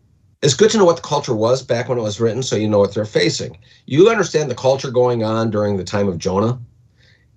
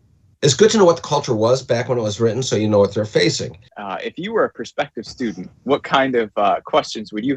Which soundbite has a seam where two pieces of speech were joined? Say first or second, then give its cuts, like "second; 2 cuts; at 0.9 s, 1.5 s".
second; 1 cut; at 3.7 s